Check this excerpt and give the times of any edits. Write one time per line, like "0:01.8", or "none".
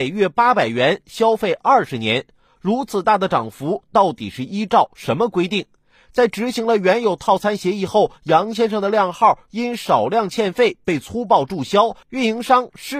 none